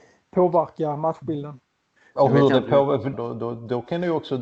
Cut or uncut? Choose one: cut